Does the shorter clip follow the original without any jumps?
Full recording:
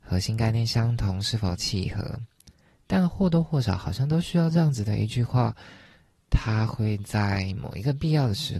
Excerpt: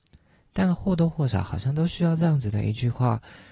yes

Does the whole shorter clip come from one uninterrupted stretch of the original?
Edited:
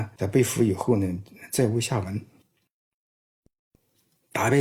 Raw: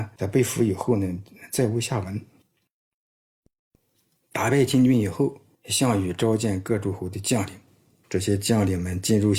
yes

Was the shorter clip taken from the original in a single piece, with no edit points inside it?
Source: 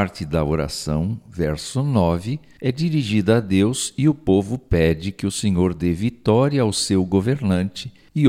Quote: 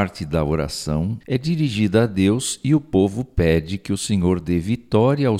no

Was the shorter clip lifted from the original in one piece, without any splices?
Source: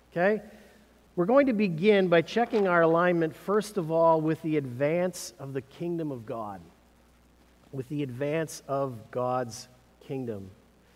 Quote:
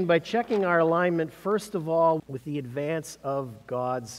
no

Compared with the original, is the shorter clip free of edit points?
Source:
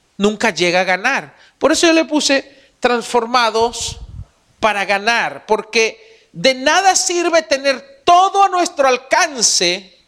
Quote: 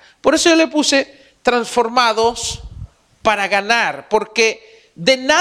yes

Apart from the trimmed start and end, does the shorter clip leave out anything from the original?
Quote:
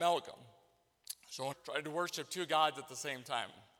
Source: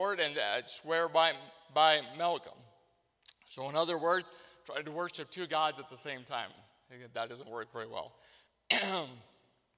yes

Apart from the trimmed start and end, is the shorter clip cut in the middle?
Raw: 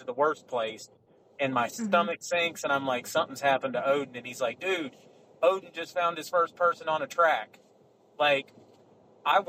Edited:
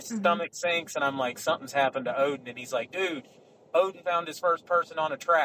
yes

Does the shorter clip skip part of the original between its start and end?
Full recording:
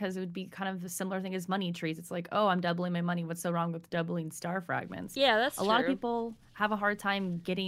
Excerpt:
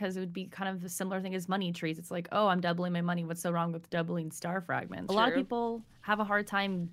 yes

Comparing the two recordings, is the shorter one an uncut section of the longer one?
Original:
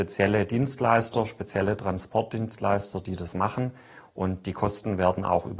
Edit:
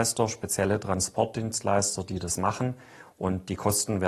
yes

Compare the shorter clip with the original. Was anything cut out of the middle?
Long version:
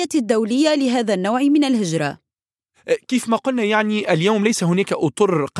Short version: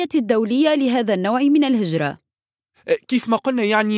no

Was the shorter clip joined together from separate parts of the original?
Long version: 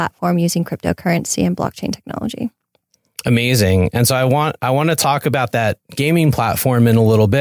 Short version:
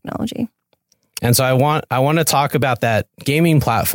yes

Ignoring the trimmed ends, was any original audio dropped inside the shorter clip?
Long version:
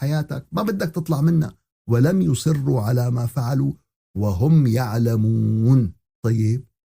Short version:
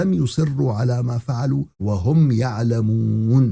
yes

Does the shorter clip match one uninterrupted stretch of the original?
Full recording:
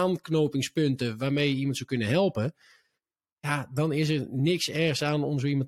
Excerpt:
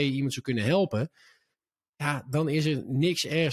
yes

